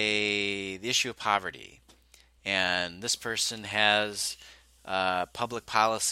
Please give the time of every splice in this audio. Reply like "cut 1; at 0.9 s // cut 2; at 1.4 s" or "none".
none